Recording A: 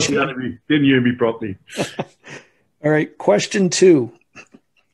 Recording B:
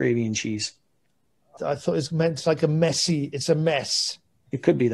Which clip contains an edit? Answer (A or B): B